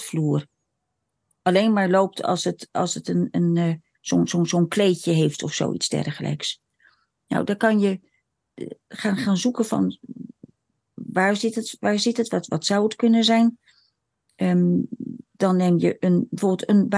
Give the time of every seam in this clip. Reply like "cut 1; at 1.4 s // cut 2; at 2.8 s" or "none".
none